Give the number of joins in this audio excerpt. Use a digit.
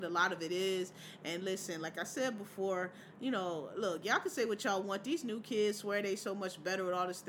0